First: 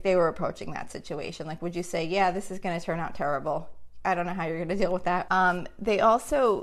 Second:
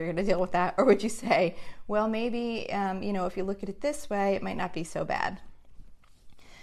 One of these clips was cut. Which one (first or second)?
first